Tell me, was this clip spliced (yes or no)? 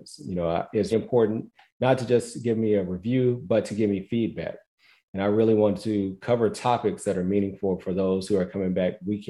yes